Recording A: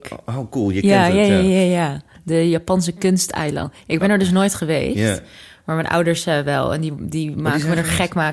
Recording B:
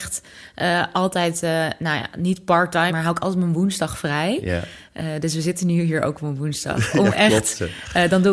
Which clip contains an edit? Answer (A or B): B